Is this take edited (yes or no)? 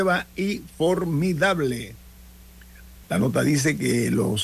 yes